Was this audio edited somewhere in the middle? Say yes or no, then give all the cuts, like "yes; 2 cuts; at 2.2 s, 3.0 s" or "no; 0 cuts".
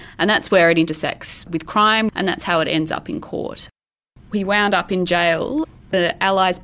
yes; 2 cuts; at 2.1 s, 4.2 s